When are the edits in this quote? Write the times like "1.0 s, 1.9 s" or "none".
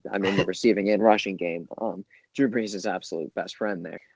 none